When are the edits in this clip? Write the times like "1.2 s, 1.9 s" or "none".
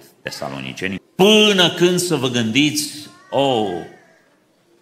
1.0 s